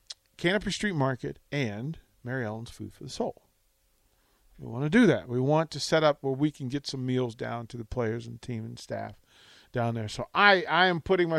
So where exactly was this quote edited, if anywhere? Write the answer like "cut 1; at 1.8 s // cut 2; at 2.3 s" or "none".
none